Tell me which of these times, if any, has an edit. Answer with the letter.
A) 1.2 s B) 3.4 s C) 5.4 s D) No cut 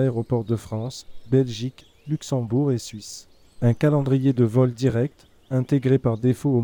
B